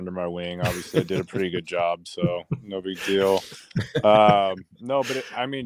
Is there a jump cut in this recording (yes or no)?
no